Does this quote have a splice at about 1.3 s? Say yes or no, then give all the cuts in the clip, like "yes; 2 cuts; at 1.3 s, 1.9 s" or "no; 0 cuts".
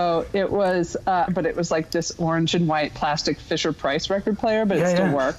yes; 1 cut; at 1.3 s